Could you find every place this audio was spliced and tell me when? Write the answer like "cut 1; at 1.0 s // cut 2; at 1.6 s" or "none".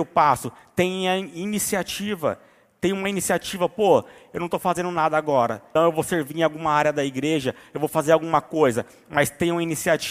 cut 1; at 5.8 s